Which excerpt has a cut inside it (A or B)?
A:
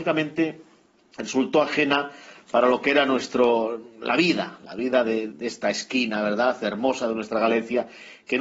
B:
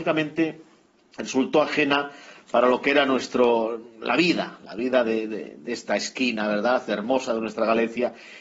A